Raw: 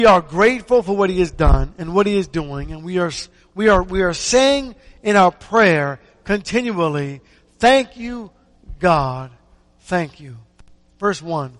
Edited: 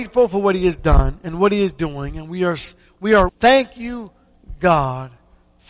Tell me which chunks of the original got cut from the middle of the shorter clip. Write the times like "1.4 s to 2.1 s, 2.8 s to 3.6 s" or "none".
3.8 s to 7.5 s